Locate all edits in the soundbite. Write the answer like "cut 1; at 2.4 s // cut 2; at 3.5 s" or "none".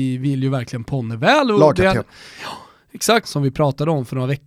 cut 1; at 3.2 s